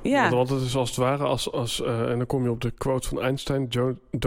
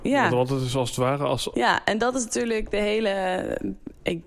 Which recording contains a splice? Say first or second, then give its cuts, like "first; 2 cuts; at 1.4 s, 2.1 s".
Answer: second; 1 cut; at 1.5 s